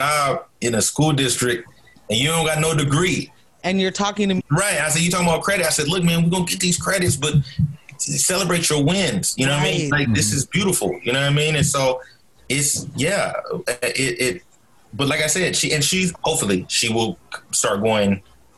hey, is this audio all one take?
no; 2 cuts; at 4.4 s, 16.1 s

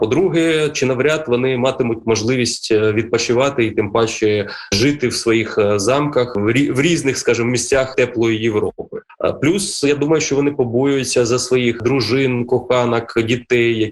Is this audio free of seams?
yes; 0 cuts

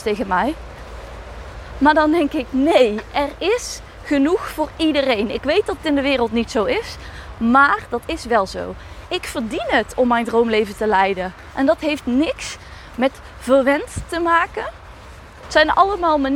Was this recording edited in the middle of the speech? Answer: yes; 3 cuts; at 9.1 s, 11.5 s, 15.4 s

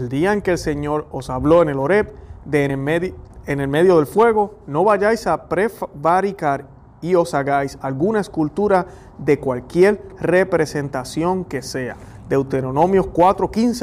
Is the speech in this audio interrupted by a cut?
no; 0 cuts

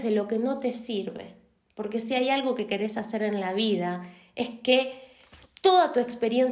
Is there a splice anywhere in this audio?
no; 0 cuts

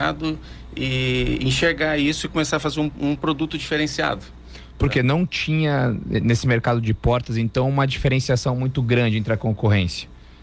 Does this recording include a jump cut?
no; 0 cuts

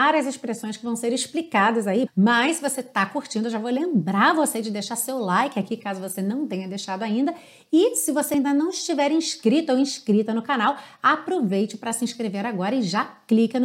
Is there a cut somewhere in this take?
yes; 1 cut; at 2.1 s

